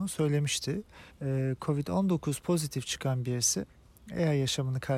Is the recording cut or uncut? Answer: cut